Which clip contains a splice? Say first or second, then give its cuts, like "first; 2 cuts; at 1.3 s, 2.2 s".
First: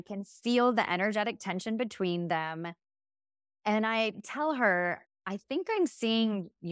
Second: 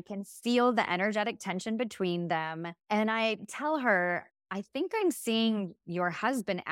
second; 1 cut; at 2.8 s